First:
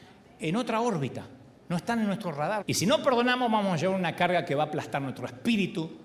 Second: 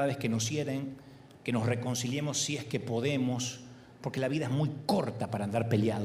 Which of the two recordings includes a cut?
first; 1 cut; at 2.6 s

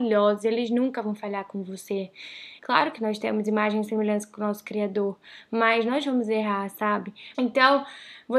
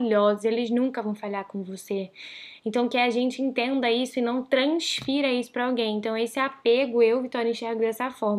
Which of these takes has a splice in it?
first; 2 cuts; at 2.6 s, 7.3 s

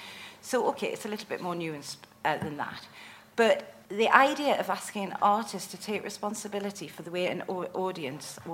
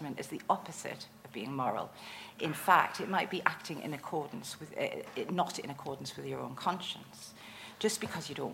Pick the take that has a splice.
first; 1 cut; at 3.9 s

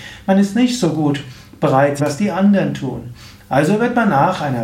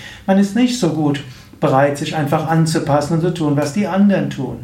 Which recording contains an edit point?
first; 1 cut; at 2.0 s

